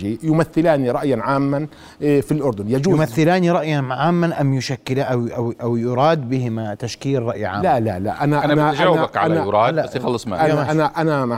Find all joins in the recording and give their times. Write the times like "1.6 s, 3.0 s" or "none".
none